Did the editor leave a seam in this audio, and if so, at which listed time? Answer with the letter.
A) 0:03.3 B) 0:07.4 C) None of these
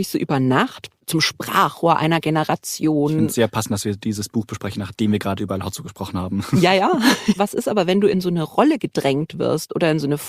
B